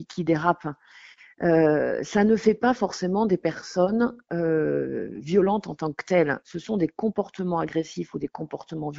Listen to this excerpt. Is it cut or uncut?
uncut